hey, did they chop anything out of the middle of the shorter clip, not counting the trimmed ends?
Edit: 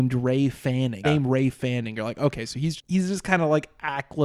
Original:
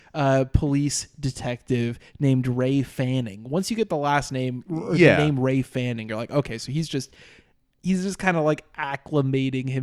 yes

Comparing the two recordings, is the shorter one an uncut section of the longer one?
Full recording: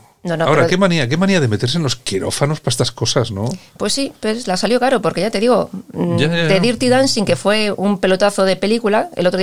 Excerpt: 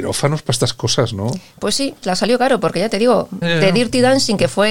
no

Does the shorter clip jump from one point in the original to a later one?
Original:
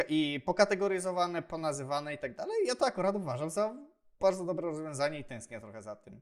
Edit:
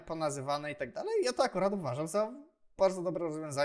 no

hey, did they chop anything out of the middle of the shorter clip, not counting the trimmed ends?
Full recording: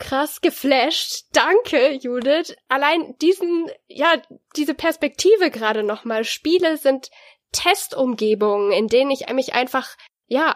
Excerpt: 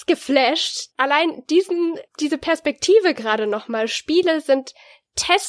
yes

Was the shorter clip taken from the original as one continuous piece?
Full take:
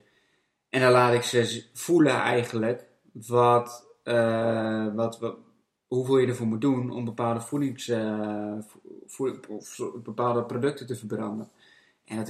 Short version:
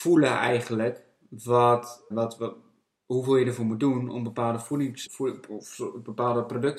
no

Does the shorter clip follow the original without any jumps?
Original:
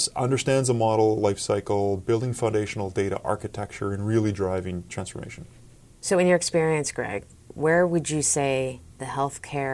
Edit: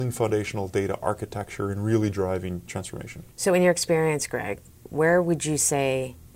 no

